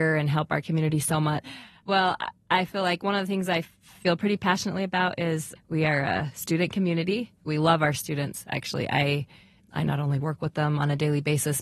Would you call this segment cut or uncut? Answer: cut